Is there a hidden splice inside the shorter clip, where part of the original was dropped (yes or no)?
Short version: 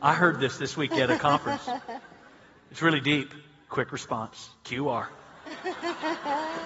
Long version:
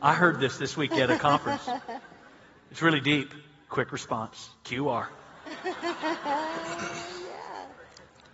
no